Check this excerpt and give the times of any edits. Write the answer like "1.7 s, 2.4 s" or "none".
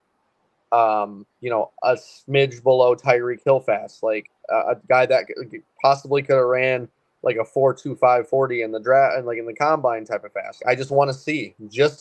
10.6 s

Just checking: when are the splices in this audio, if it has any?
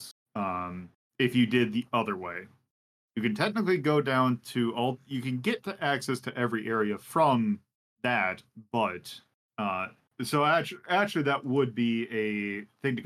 none

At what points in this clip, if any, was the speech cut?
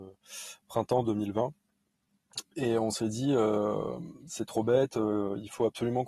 none

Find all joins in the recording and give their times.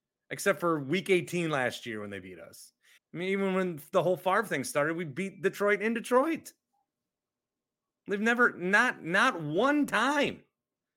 3.0 s

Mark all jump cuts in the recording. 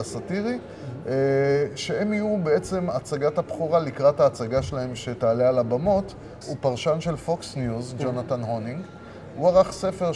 6.4 s

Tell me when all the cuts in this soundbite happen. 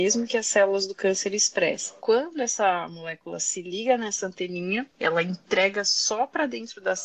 none

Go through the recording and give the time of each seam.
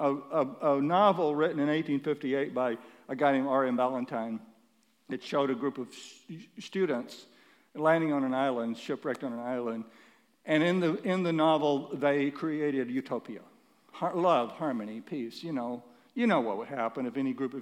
none

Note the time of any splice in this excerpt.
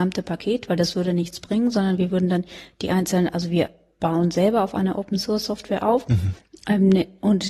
none

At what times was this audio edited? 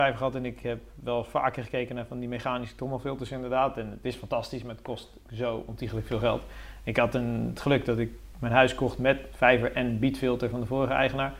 5.2 s

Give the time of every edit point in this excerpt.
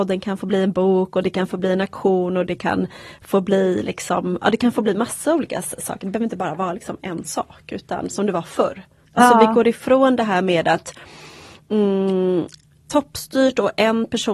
9.1 s, 12.8 s

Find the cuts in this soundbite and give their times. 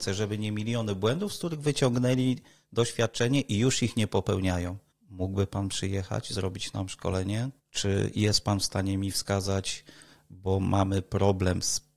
4.9 s, 7.6 s

